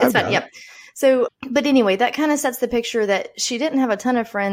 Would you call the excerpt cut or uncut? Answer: cut